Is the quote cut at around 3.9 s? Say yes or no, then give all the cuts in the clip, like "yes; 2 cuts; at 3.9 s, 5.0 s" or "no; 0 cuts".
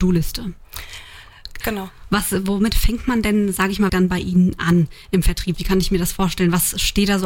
yes; 3 cuts; at 1.6 s, 3.9 s, 5.5 s